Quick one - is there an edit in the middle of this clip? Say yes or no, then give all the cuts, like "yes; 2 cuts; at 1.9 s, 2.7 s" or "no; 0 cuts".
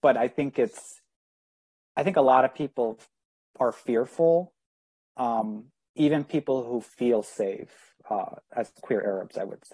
no; 0 cuts